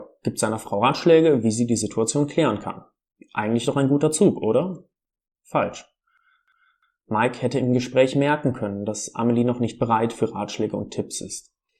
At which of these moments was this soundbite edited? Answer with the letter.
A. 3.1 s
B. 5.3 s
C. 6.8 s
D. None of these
D